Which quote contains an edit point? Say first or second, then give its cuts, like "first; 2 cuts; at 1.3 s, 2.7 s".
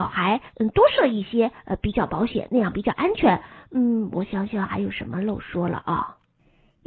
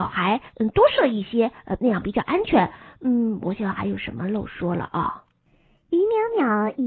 second; 2 cuts; at 1.8 s, 3.6 s